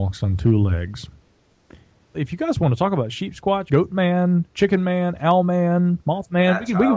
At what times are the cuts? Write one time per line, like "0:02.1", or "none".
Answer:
0:02.1
0:03.7